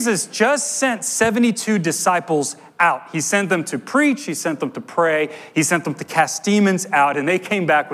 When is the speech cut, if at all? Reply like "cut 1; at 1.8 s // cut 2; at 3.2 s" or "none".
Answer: none